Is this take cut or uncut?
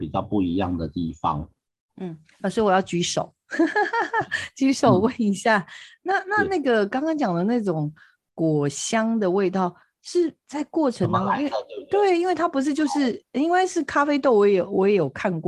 uncut